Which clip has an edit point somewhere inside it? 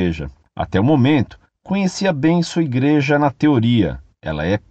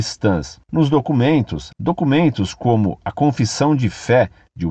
second; 1 cut; at 1.7 s

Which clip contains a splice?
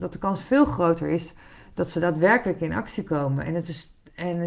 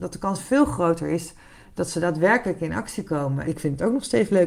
second; 1 cut; at 3.4 s

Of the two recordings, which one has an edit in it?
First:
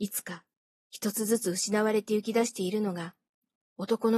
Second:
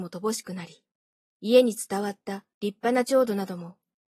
second; 2 cuts; at 1.2 s, 2.5 s

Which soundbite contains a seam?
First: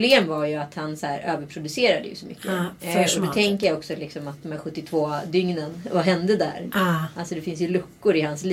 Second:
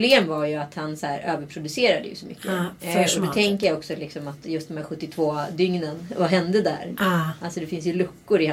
first; 1 cut; at 4.4 s

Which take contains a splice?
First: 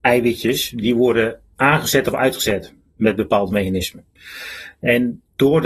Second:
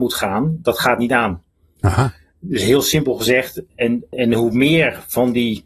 second; 1 cut; at 4.1 s

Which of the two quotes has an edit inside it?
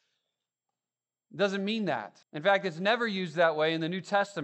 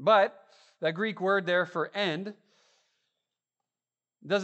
first; 1 cut; at 2.2 s

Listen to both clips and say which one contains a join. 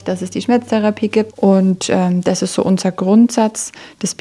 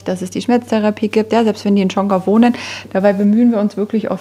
first; 1 cut; at 1.3 s

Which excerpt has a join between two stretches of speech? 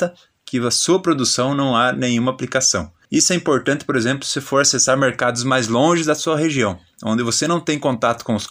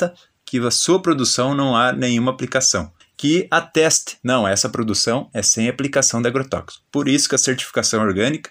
second; 1 cut; at 3.0 s

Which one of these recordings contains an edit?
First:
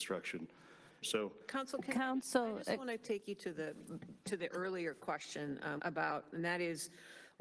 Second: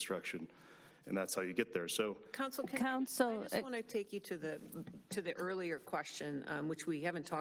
first; 2 cuts; at 1.0 s, 5.8 s

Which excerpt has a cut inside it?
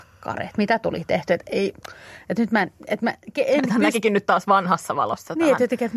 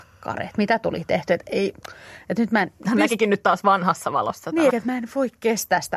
second; 2 cuts; at 2.8 s, 4.7 s

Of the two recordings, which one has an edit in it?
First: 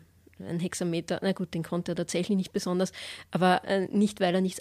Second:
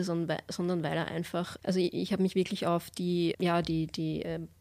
second; 2 cuts; at 1.6 s, 3.3 s

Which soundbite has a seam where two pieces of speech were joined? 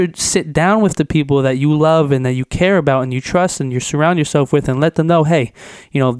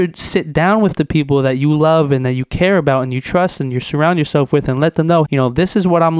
second; 1 cut; at 5.2 s

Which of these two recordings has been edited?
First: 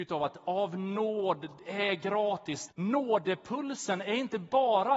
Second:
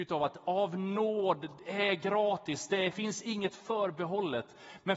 first; 1 cut; at 2.7 s

